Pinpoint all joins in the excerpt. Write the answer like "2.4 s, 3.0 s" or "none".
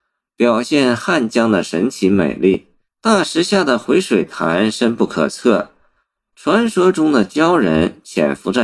2.9 s, 6.3 s